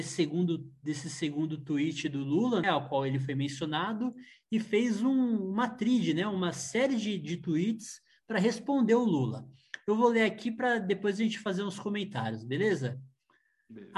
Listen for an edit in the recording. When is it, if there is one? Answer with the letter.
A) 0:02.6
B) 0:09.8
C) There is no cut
A